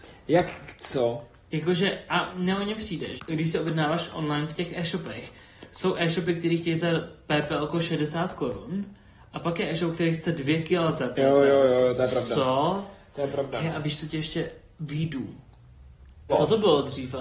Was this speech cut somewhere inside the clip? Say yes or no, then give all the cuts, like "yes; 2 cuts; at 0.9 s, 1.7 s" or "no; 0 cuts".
yes; 2 cuts; at 3.2 s, 16.3 s